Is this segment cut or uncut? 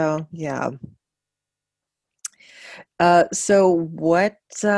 uncut